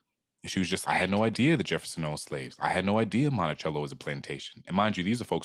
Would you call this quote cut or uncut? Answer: uncut